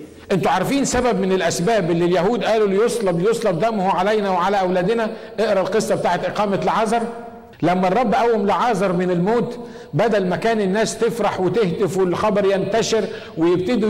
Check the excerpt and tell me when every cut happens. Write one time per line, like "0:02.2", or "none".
0:07.5